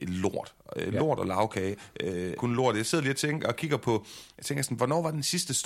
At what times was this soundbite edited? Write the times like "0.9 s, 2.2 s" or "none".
2.4 s